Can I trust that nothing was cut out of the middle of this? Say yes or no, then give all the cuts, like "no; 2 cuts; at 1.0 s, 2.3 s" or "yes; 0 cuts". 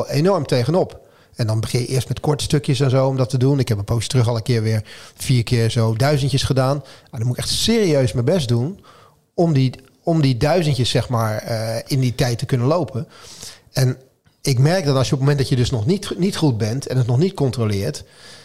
yes; 0 cuts